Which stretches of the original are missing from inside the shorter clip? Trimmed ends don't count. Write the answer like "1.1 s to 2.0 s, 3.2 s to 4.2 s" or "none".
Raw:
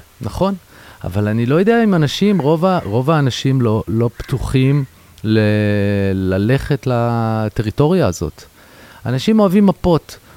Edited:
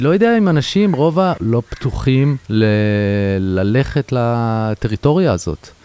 2.8 s to 3.8 s, 4.9 s to 5.2 s